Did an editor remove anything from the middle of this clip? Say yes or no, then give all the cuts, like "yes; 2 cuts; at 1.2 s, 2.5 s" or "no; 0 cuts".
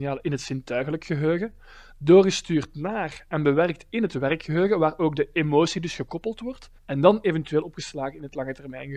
yes; 1 cut; at 6.8 s